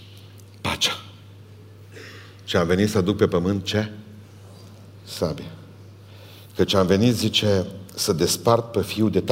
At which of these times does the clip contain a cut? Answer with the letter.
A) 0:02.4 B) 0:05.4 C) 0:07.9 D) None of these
D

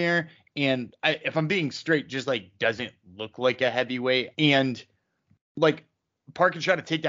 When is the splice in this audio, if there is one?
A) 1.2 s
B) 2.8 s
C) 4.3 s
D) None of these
C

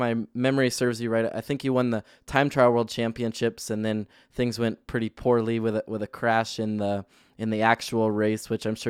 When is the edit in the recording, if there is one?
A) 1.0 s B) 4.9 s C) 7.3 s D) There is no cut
D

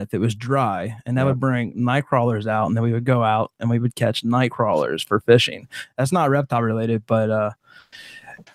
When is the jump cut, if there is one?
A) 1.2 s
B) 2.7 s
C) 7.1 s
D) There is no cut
D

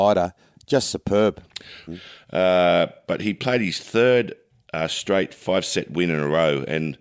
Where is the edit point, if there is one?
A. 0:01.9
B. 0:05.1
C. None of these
A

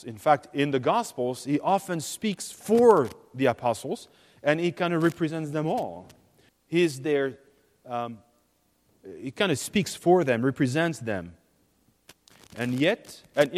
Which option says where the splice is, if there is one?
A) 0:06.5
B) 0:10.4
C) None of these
A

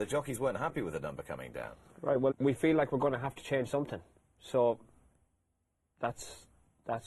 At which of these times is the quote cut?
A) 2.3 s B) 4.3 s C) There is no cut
A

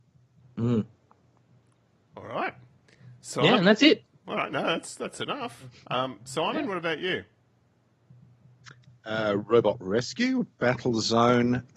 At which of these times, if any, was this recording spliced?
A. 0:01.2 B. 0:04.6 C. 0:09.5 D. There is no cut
D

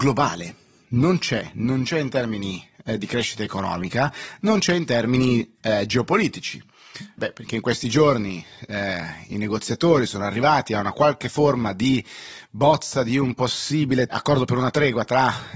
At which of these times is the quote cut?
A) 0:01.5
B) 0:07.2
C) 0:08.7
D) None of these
B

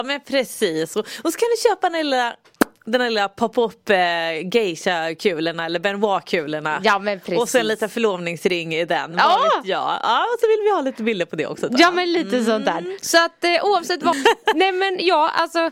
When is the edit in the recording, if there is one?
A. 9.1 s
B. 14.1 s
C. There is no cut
B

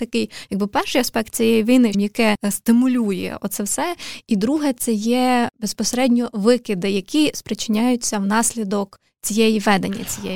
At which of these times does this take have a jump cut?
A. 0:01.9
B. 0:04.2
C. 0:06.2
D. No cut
A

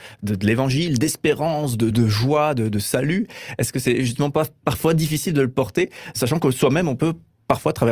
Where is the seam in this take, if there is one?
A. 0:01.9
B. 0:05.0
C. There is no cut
A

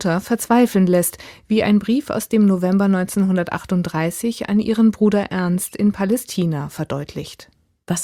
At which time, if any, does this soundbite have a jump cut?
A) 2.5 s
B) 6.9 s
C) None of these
C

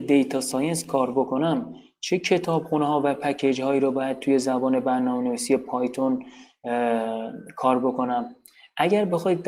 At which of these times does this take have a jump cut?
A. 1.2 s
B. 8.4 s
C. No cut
C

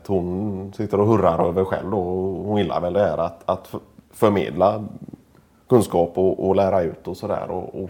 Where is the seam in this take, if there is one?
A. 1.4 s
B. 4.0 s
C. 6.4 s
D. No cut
C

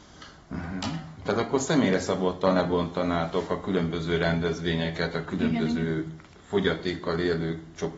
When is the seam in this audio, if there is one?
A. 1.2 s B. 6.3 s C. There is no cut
A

